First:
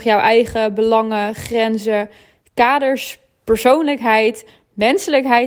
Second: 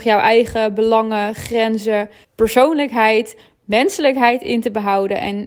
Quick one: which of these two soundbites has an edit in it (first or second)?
second